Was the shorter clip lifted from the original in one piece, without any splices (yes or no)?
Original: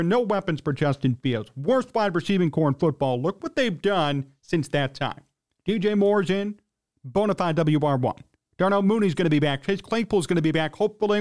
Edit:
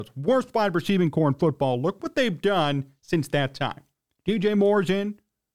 yes